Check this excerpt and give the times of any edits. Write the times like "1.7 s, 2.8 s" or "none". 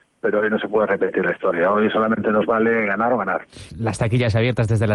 3.7 s